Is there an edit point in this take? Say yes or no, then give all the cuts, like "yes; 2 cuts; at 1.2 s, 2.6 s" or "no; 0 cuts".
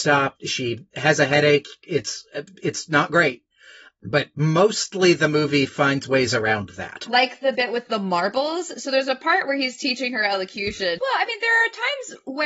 yes; 2 cuts; at 7.1 s, 11.0 s